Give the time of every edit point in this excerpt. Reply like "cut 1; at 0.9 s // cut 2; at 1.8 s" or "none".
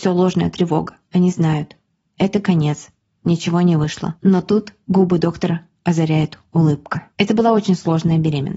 cut 1; at 1.0 s